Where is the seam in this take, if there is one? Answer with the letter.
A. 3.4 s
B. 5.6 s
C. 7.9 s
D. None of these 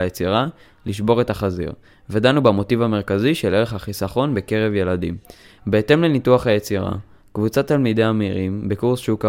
B